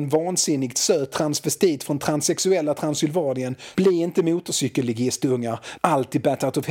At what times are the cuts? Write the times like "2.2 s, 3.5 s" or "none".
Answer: 3.7 s, 5.8 s